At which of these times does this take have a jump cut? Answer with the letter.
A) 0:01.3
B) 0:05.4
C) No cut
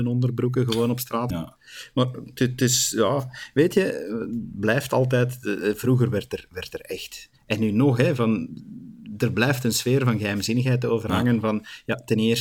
A